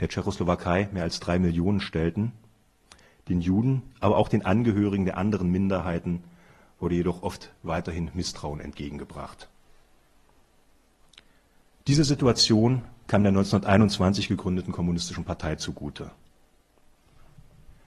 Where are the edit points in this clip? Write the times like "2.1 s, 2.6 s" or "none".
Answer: none